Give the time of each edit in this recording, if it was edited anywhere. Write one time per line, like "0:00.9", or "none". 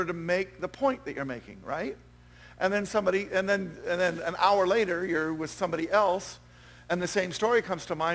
none